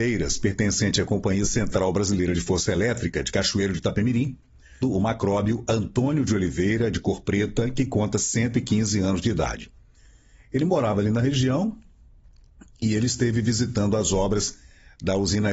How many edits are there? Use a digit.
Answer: 1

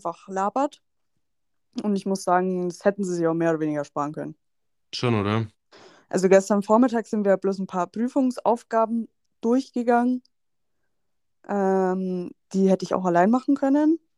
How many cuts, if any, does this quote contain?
0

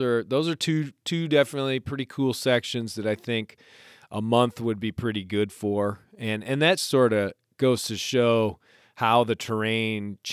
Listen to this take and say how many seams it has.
1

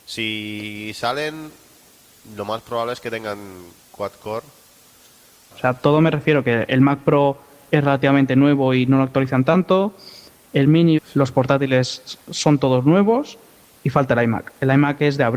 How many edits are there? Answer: 2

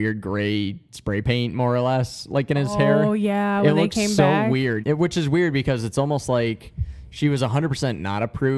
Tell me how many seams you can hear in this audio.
1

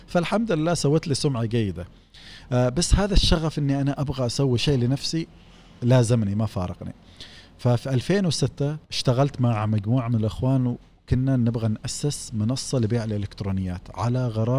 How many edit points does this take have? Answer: 1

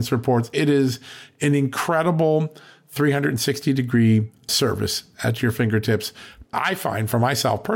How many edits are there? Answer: 1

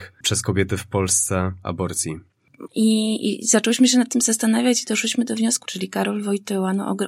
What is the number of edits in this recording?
2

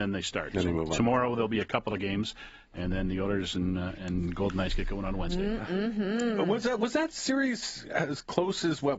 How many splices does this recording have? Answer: 0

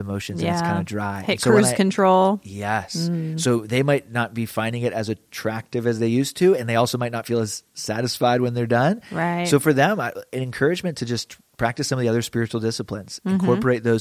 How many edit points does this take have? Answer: 0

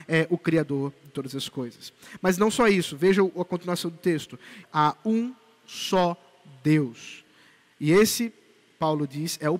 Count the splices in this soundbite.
1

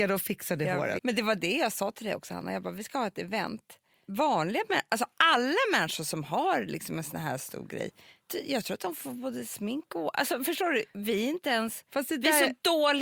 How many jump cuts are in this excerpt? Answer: 1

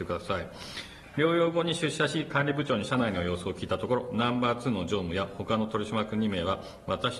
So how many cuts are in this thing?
0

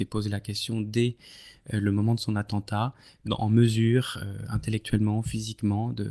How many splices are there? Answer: 1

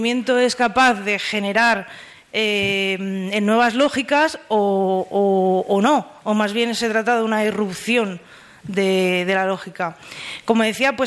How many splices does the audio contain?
0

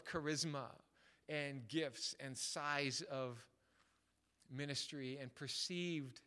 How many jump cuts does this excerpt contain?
0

